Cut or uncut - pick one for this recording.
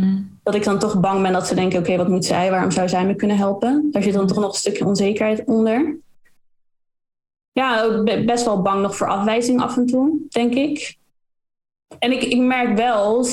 uncut